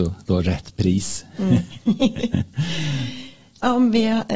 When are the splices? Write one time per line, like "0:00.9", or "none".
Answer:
none